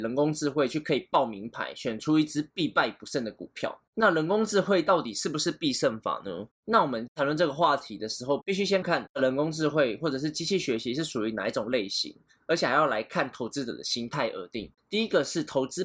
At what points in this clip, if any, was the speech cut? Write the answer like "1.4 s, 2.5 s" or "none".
8.8 s, 14.8 s